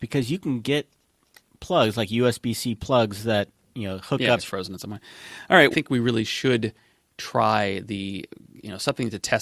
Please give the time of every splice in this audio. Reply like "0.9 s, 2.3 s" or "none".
4.4 s, 5.7 s